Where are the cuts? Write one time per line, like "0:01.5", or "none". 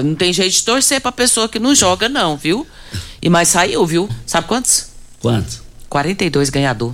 0:04.1